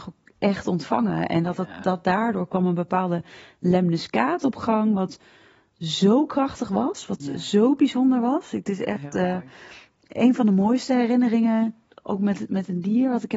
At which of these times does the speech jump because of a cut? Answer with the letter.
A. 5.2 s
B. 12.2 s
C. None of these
C